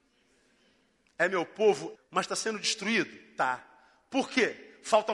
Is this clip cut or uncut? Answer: cut